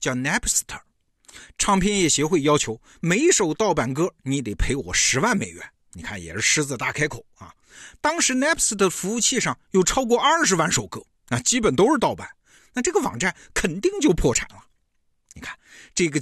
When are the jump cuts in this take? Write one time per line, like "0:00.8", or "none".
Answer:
0:12.6